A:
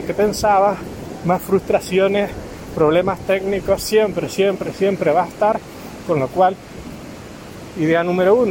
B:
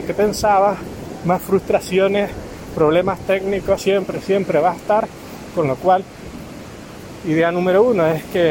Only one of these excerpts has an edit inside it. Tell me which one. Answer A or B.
B